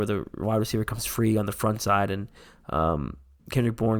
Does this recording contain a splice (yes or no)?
no